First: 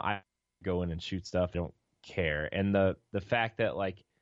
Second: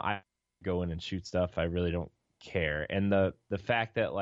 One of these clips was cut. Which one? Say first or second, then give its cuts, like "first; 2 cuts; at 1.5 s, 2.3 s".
first; 1 cut; at 1.5 s